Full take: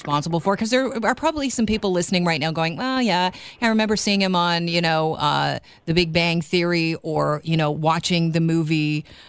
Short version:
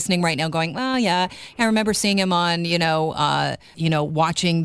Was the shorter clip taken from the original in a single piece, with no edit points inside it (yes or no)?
no